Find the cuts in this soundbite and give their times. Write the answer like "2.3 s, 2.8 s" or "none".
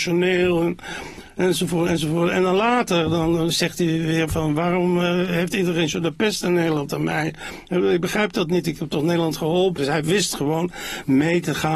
3.5 s, 9.8 s